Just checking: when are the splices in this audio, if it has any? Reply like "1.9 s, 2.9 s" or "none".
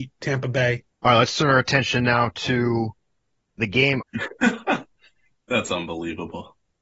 0.9 s, 4.0 s